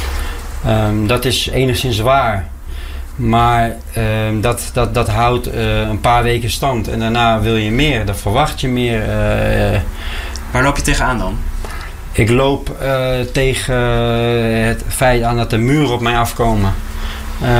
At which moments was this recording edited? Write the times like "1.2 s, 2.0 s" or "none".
none